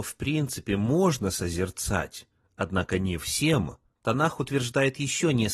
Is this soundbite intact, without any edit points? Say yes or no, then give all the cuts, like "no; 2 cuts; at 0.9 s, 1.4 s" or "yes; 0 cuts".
yes; 0 cuts